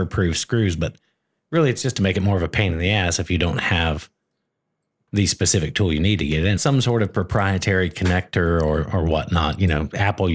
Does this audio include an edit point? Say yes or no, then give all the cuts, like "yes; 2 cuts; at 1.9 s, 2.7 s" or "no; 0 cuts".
yes; 1 cut; at 6.6 s